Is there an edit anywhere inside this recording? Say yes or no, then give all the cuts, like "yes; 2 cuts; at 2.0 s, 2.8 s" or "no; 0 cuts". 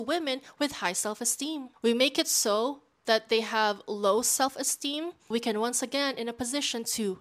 yes; 2 cuts; at 1.8 s, 5.3 s